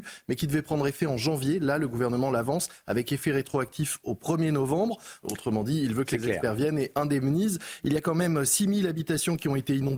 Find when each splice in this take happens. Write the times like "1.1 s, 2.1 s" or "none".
5.2 s